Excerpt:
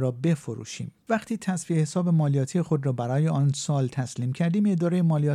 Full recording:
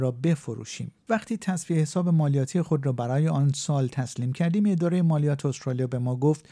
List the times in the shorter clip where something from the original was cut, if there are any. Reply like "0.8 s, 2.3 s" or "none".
none